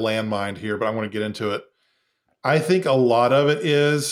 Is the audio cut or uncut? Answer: uncut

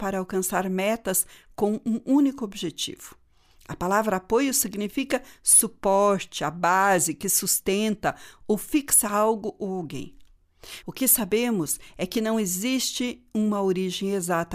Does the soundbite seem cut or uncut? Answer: cut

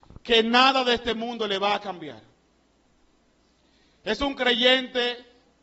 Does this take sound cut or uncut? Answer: uncut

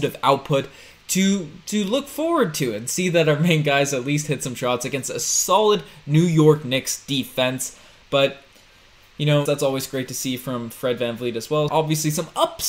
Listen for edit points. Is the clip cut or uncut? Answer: cut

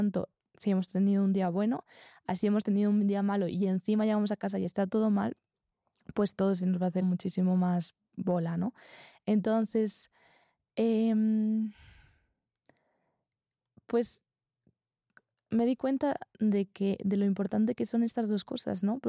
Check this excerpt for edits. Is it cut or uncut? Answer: cut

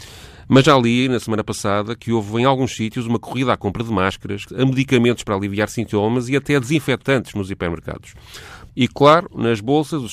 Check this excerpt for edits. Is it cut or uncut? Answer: cut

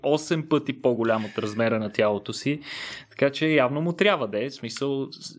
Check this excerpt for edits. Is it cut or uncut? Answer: uncut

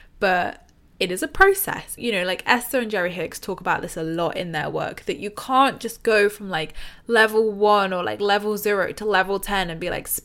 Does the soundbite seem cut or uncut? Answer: cut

